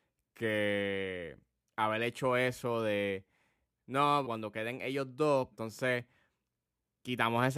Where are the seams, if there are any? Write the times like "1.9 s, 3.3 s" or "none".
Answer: 4.2 s, 5.5 s

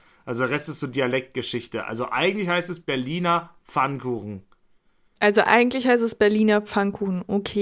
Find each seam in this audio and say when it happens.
none

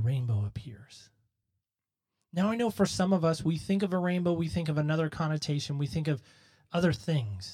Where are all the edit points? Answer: none

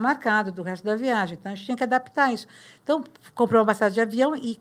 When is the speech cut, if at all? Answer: none

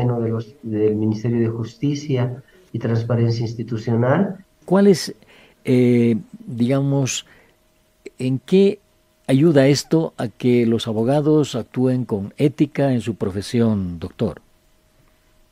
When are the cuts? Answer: 4.6 s

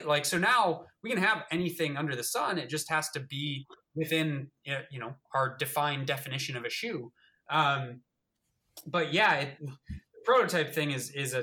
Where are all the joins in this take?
9.6 s

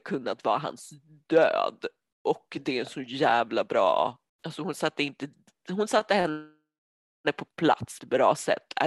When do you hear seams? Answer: 4.3 s

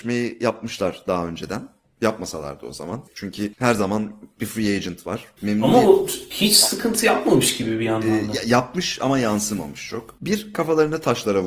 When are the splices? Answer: 5.4 s, 10.2 s

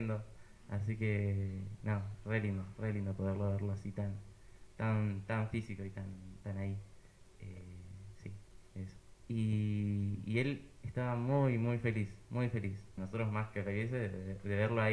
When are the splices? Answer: 9.3 s, 13.0 s

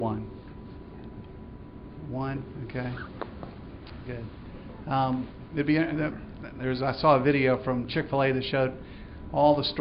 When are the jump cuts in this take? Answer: none

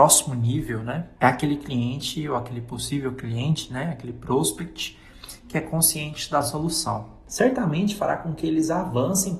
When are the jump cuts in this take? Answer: 1.2 s, 7.3 s

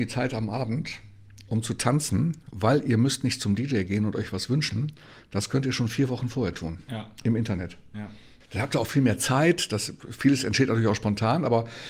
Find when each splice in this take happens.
8.4 s

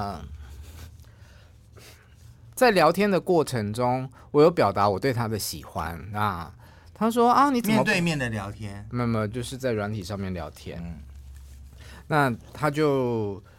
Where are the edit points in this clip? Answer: none

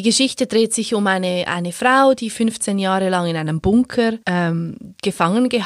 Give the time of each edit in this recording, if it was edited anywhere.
4.2 s

